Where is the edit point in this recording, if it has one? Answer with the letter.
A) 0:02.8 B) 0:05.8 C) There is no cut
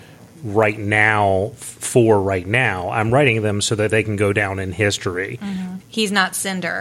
B